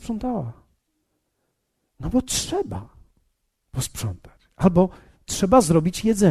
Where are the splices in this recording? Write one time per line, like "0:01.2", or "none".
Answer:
none